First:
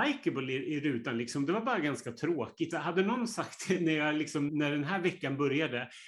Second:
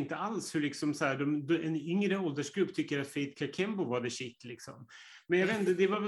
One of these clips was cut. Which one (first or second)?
first